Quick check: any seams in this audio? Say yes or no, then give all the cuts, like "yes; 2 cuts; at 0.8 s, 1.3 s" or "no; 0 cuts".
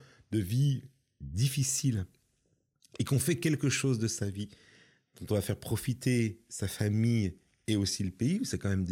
no; 0 cuts